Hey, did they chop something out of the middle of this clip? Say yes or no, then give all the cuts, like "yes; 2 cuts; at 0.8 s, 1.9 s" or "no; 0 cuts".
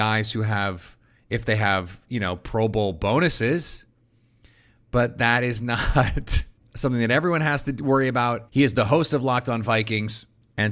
yes; 1 cut; at 8.5 s